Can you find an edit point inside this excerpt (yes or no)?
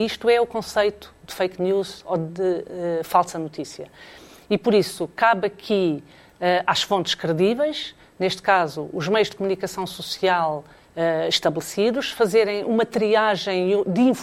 no